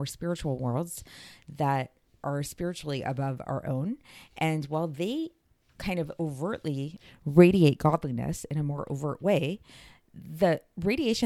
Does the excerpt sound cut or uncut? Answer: uncut